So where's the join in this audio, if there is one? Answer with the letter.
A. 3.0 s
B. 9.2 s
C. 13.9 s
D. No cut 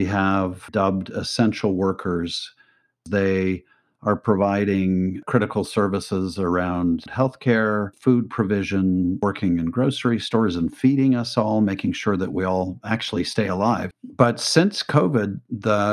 C